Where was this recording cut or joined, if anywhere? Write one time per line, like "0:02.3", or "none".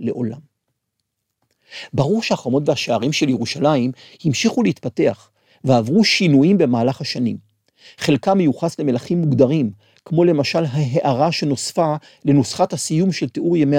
none